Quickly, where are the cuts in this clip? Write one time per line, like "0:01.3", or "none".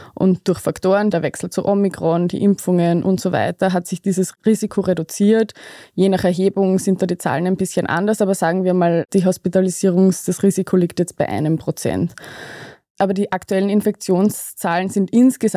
0:01.1